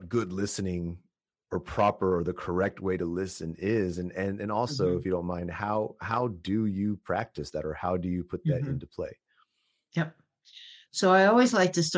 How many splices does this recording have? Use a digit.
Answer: 0